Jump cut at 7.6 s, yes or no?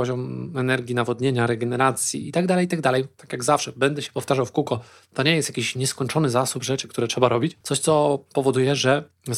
yes